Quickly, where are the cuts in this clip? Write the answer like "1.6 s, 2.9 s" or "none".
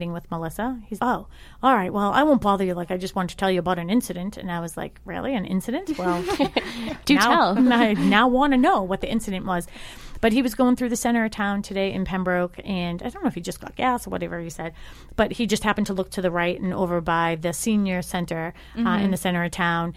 1.0 s